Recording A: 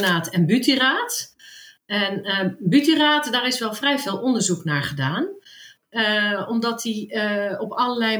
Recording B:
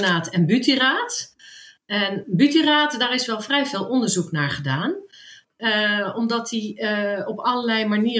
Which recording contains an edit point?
B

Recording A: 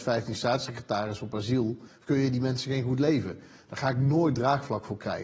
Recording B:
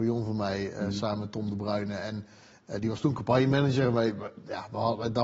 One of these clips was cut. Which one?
A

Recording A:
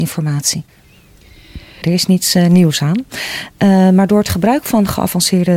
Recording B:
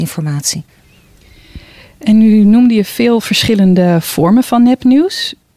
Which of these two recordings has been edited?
A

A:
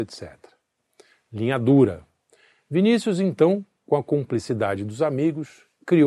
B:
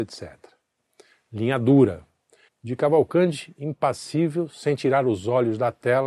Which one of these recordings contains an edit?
B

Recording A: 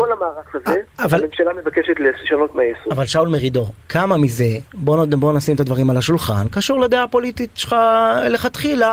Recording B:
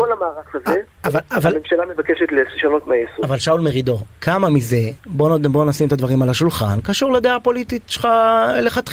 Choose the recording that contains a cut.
A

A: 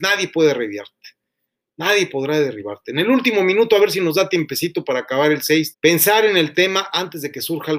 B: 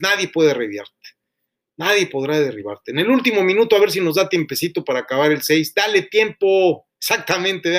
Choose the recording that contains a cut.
A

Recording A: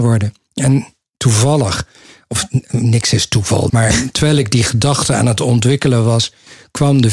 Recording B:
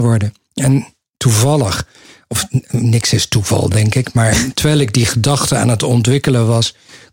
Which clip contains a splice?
A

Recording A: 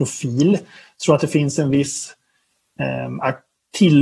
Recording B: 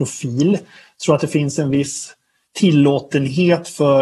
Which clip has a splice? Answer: B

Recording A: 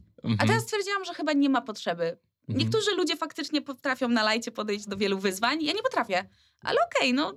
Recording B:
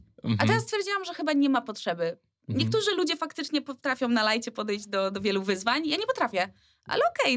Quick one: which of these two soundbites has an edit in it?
A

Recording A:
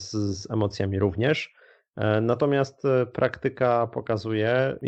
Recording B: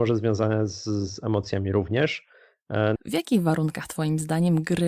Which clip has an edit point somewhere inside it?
B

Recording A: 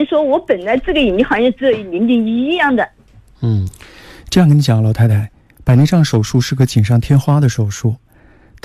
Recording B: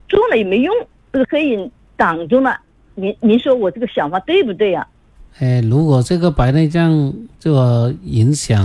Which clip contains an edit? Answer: B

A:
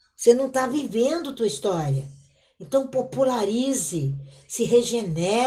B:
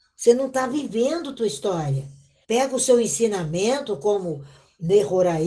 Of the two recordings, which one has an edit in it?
B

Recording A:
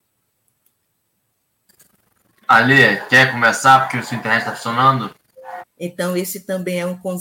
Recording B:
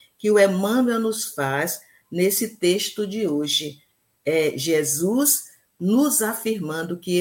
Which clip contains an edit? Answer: A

